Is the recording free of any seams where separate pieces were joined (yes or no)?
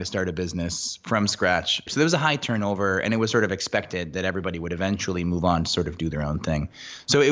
no